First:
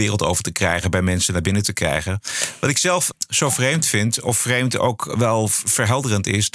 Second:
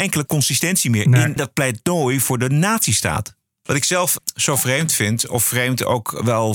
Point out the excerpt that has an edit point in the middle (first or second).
second